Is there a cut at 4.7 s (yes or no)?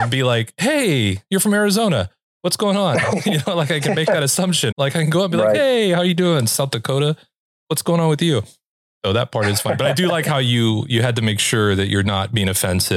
yes